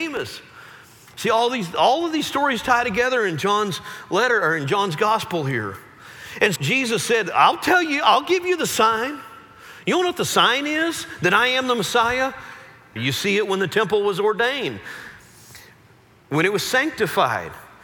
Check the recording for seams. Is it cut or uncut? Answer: cut